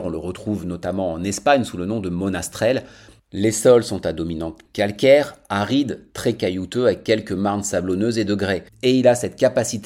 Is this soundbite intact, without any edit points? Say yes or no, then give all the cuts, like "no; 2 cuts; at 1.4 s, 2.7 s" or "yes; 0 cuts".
no; 3 cuts; at 3.2 s, 4.7 s, 8.7 s